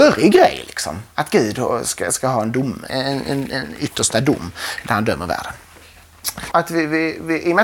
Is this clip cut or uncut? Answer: cut